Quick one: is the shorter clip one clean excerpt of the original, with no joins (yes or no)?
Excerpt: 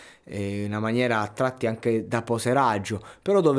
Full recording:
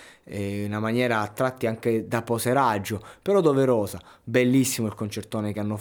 yes